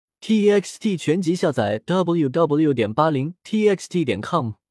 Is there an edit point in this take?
yes; 1 cut; at 2.3 s

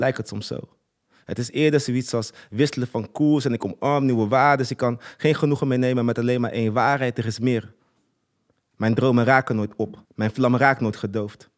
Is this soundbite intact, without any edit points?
no; 1 cut; at 10.0 s

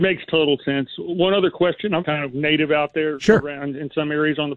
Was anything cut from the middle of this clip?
yes; 1 cut; at 2.0 s

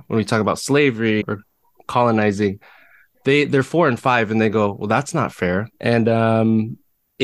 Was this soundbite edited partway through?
yes; 2 cuts; at 1.2 s, 5.7 s

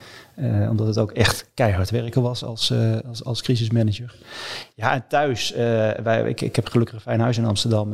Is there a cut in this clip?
no; 0 cuts

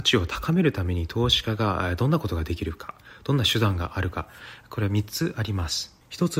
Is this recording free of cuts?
yes; 0 cuts

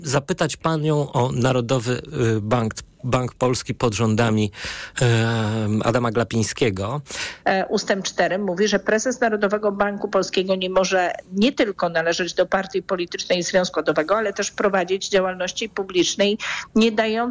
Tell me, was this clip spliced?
yes; 2 cuts; at 7.4 s, 13.7 s

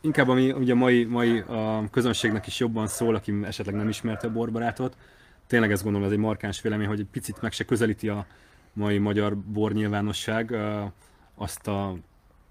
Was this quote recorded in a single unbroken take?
yes; 0 cuts

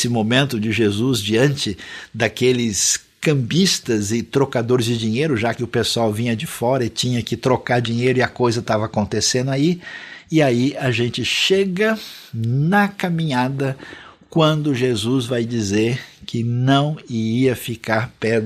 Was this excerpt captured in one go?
yes; 0 cuts

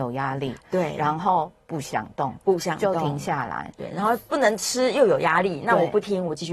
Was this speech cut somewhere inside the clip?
no; 0 cuts

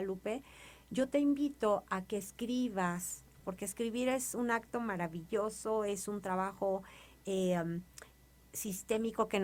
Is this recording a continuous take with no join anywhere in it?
no; 1 cut; at 3.4 s

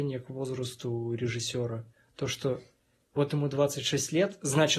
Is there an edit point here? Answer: no; 0 cuts

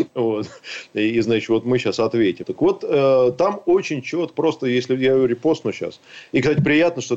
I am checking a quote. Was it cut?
yes; 2 cuts; at 2.4 s, 4.3 s

